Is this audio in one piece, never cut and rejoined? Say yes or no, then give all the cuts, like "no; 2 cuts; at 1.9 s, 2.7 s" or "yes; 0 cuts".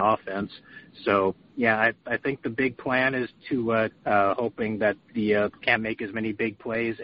no; 2 cuts; at 3.9 s, 5.5 s